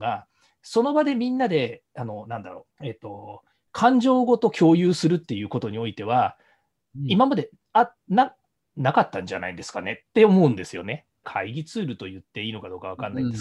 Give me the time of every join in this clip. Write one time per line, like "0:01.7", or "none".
0:02.7
0:11.2